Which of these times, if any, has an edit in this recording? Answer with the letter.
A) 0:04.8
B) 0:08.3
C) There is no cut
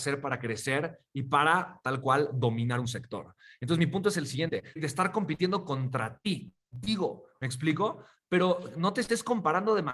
A